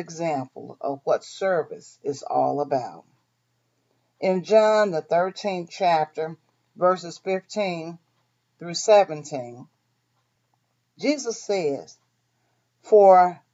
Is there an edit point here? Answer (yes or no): no